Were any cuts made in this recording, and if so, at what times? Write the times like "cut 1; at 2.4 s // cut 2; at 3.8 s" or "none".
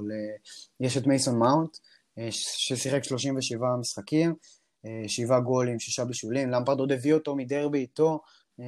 none